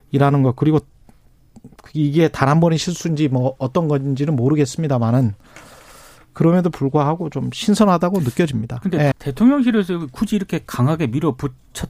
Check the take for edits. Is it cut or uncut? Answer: cut